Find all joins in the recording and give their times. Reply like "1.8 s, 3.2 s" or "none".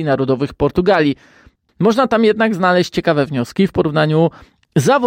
1.7 s